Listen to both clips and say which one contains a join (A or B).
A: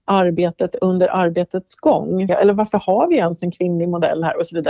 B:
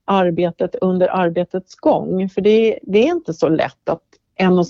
A